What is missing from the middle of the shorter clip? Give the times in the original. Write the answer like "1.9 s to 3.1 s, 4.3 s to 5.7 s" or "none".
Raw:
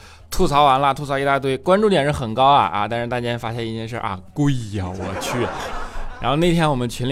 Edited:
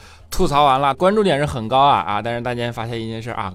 0.9 s to 1.6 s